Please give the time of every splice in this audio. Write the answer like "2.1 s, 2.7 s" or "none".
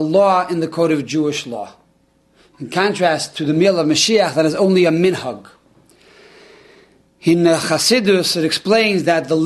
none